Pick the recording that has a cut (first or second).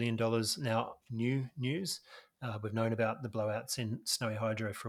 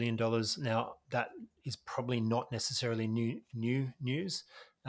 first